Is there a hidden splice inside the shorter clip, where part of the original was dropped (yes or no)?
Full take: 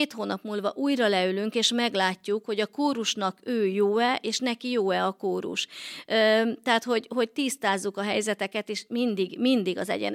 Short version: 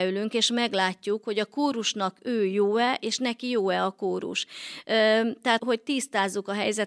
yes